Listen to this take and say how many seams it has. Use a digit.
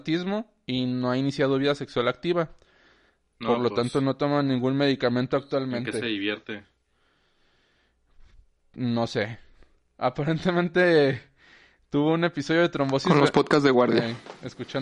0